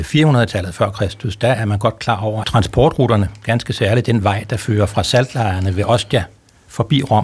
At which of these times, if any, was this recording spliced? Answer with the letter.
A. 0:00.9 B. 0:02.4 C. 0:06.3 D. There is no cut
B